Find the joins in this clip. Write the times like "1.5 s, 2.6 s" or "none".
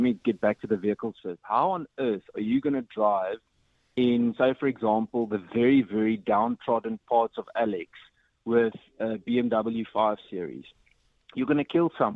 none